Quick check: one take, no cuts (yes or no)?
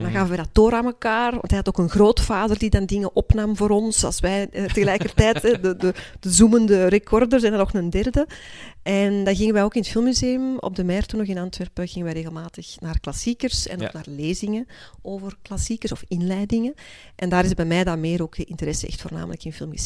yes